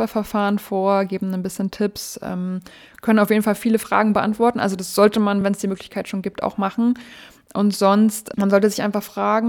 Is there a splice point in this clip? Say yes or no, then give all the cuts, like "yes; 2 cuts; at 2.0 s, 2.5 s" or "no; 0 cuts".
no; 0 cuts